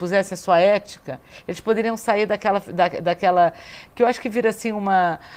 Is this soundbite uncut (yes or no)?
yes